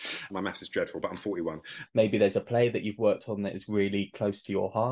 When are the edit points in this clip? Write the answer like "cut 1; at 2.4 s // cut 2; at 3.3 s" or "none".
cut 1; at 1.9 s